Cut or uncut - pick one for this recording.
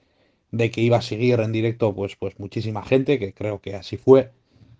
uncut